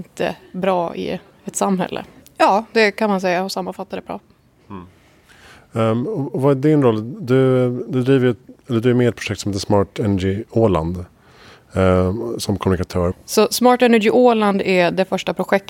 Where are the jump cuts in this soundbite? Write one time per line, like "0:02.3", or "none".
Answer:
0:02.2
0:13.1